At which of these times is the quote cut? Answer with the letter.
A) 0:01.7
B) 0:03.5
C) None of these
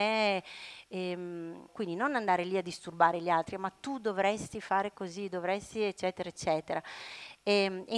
A